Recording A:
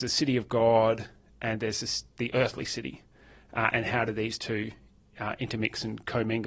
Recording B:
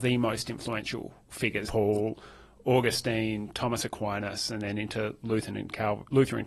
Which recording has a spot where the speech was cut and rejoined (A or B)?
B